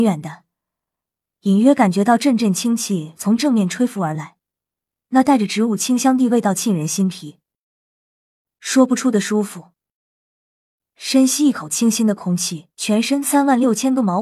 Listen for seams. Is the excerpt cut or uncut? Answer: cut